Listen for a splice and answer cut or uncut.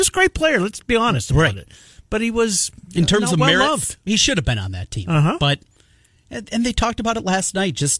uncut